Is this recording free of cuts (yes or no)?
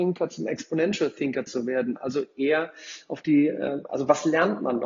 yes